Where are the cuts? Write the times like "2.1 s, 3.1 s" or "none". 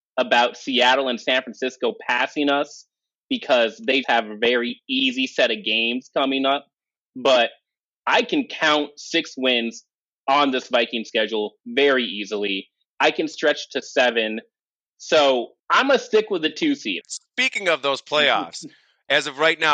4.0 s, 15.6 s, 17.0 s